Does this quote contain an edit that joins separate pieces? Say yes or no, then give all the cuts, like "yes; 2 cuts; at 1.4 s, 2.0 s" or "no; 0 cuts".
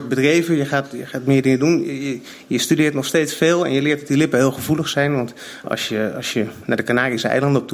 no; 0 cuts